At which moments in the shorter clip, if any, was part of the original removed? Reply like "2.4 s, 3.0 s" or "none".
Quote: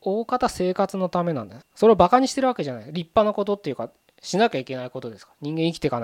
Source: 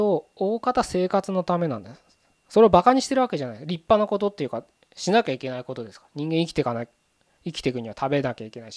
1.6 s